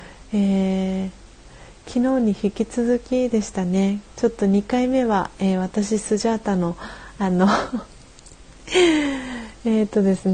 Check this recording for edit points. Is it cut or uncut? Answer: cut